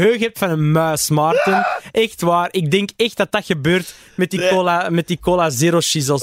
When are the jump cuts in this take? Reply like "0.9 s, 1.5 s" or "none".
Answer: none